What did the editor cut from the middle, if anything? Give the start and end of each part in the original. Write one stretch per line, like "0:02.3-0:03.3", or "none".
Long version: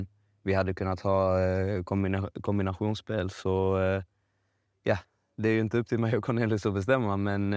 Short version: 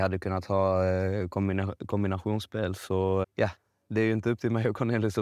0:03.8-0:04.7